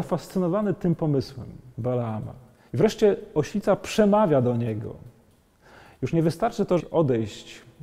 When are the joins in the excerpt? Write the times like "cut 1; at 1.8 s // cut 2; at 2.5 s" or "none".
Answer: cut 1; at 1.7 s // cut 2; at 6.8 s